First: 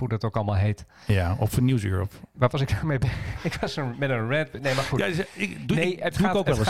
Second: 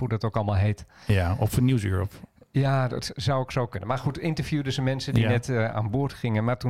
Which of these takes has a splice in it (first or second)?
first